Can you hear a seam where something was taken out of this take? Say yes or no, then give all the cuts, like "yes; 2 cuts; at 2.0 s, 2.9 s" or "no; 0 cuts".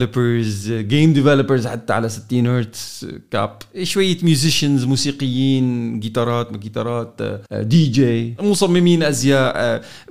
yes; 1 cut; at 7.5 s